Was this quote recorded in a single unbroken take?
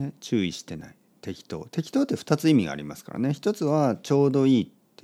yes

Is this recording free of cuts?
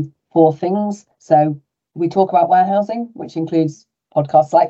yes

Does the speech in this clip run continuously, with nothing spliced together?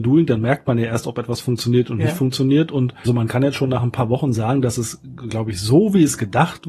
no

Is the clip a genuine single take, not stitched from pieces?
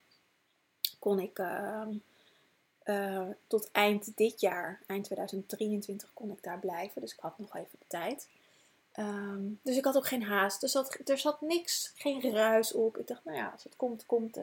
yes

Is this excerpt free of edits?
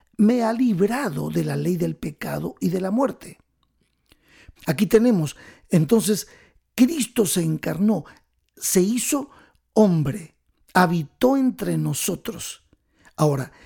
no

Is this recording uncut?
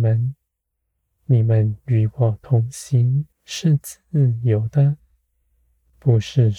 no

